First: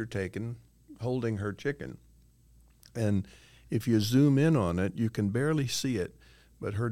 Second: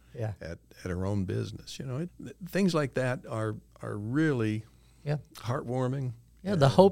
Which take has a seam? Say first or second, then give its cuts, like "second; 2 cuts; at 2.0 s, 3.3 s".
second; 1 cut; at 2.1 s